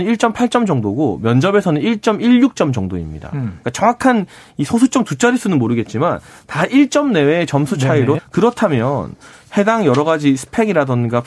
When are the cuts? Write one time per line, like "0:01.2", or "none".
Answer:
0:08.2